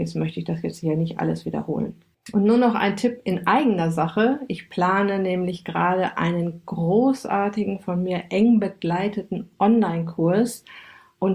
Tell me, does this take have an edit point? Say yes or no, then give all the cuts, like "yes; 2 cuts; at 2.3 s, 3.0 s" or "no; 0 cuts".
yes; 1 cut; at 2.1 s